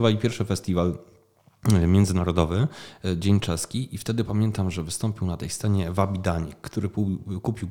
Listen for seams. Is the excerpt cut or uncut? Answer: uncut